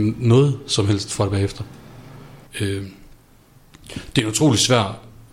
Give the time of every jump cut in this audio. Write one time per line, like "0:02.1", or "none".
0:02.5